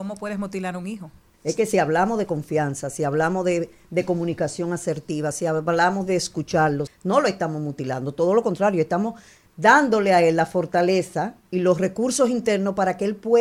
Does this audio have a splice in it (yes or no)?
yes